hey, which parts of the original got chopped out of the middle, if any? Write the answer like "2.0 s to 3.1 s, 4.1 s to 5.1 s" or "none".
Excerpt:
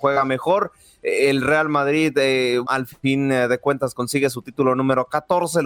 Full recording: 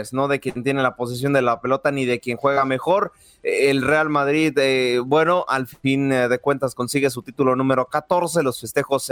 5.1 s to 5.5 s